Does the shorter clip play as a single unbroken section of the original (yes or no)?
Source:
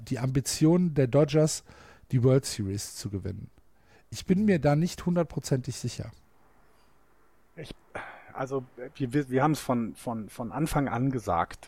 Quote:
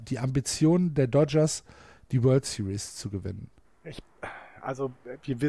no